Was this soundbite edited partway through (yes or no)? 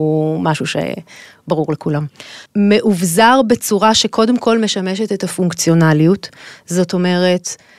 yes